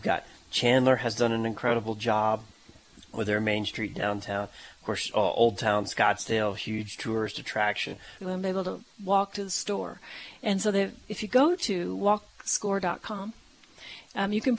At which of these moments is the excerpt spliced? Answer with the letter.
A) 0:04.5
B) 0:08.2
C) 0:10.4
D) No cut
B